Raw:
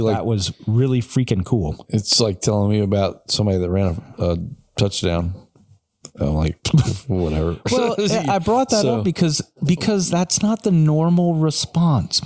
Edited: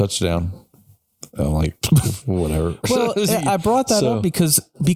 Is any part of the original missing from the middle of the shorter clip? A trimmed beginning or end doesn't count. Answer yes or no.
no